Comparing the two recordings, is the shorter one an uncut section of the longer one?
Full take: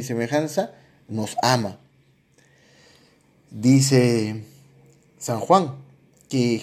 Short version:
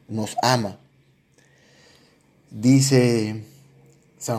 yes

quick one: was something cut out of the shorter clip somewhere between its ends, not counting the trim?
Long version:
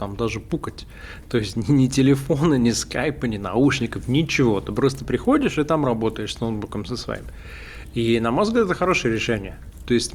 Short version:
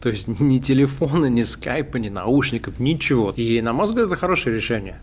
yes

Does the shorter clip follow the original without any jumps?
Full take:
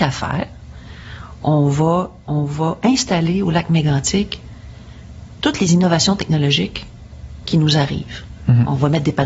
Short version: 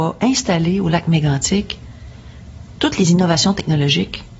yes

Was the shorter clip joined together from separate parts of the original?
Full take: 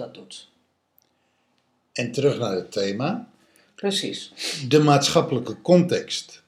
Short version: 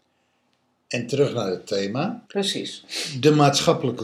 yes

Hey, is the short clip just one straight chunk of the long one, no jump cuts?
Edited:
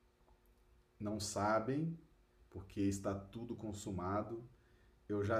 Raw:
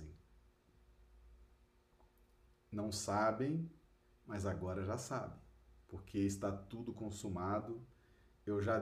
no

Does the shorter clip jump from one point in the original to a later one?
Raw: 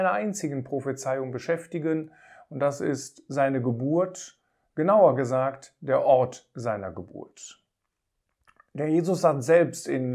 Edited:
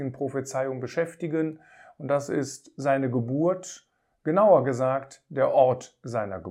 no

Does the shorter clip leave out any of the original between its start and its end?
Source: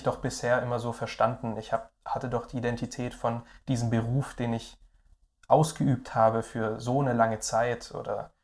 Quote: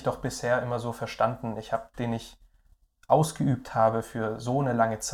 yes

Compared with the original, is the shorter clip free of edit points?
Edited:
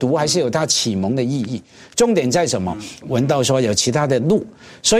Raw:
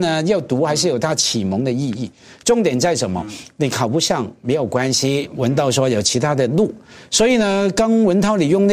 no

